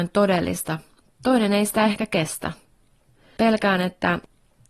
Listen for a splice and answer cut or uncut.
uncut